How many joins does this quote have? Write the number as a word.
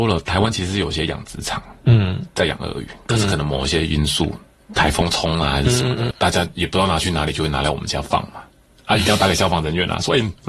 one